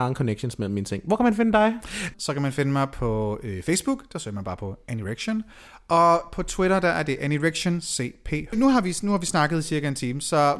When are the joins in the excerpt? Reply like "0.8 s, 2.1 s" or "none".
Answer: 2.1 s, 8.5 s